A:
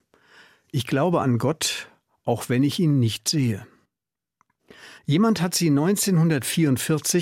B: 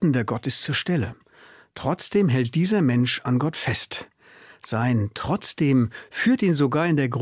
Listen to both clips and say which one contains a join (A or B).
A